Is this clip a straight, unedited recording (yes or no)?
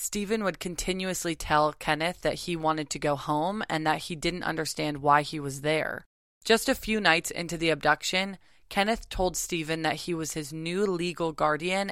yes